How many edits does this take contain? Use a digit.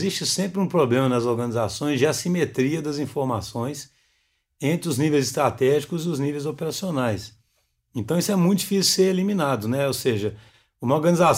0